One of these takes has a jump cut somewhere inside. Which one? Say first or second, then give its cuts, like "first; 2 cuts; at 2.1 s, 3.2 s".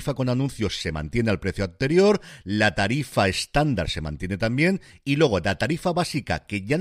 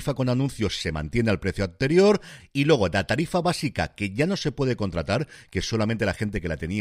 second; 1 cut; at 2.4 s